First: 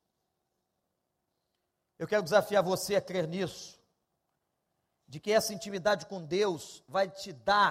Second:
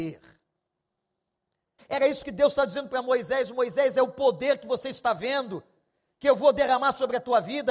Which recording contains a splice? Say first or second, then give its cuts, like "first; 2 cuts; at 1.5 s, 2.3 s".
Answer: second; 1 cut; at 1.8 s